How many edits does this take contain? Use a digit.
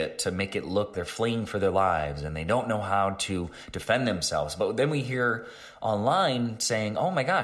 1